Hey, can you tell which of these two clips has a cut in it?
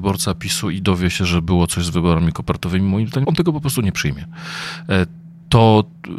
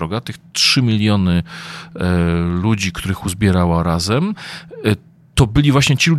first; 1 cut; at 3.2 s

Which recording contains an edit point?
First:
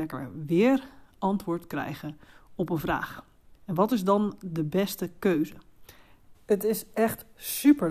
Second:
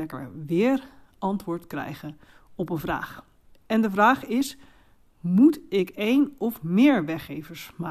first; 2 cuts; at 3.5 s, 6.3 s

